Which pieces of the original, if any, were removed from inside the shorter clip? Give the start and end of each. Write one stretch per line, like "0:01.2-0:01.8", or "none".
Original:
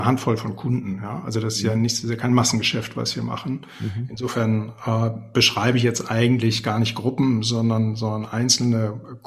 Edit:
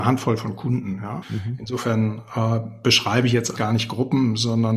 0:01.2-0:03.7
0:06.1-0:06.6